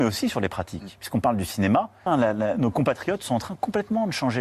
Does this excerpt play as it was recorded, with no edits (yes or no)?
no